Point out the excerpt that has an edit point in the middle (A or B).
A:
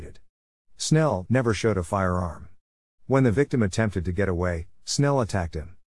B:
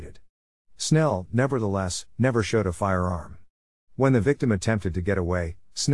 A